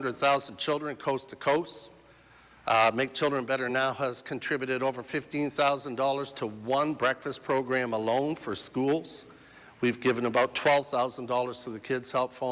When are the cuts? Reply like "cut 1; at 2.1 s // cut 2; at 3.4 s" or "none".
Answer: none